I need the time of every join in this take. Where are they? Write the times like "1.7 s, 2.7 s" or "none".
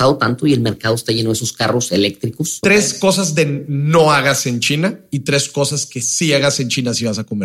2.6 s